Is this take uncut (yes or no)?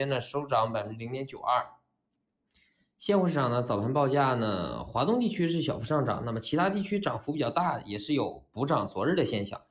yes